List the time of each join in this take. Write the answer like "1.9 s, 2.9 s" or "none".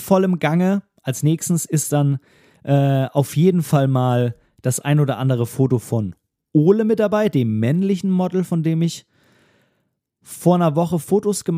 none